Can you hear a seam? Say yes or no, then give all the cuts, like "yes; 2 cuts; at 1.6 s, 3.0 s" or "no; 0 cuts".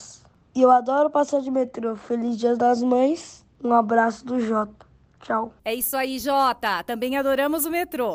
yes; 1 cut; at 5.6 s